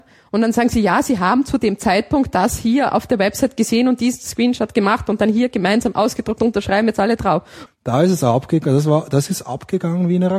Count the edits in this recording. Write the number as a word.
one